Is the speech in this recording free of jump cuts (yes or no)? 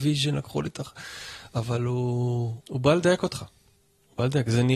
no